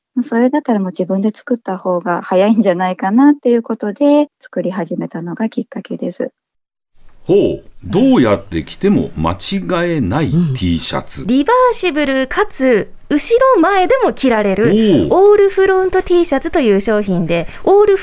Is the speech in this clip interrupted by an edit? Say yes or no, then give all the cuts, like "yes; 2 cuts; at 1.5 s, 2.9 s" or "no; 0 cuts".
yes; 1 cut; at 11.2 s